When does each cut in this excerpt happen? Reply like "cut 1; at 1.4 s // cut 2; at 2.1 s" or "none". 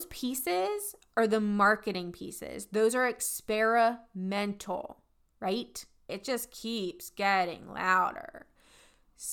cut 1; at 6.1 s